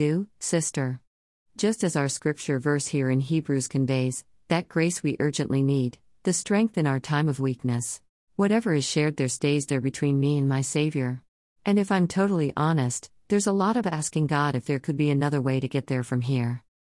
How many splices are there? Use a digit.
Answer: 2